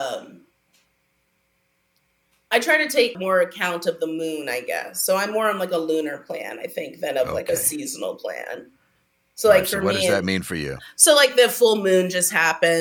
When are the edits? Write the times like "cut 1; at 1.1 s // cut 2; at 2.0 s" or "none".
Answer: cut 1; at 3.1 s